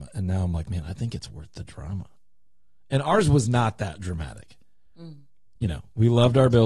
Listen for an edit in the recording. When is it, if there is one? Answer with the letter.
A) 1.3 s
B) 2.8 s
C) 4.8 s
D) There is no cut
D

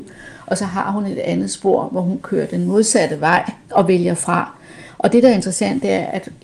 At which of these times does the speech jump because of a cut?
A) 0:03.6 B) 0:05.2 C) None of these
A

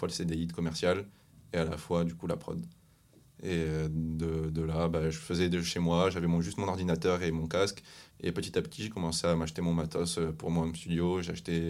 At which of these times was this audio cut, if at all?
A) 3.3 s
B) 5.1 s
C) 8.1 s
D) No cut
C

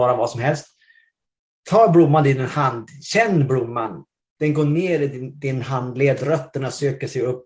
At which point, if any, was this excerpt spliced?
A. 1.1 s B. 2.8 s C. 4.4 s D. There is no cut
C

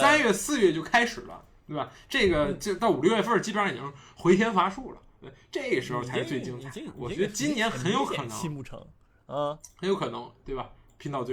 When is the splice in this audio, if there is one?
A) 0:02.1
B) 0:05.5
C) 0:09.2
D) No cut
D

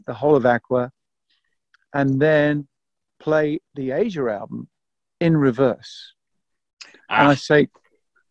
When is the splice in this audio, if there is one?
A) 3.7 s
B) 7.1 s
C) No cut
A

